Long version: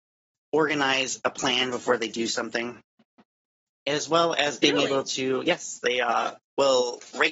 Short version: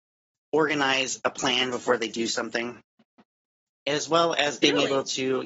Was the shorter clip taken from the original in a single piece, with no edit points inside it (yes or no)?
yes